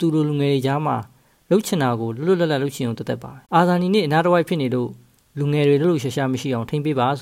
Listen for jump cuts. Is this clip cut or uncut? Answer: cut